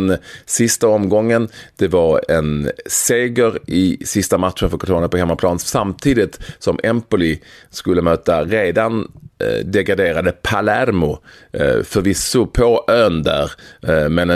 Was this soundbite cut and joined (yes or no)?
no